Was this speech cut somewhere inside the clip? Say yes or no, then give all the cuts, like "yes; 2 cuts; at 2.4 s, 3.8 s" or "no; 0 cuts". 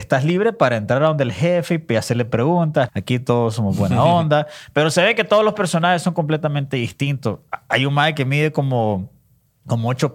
yes; 1 cut; at 2.9 s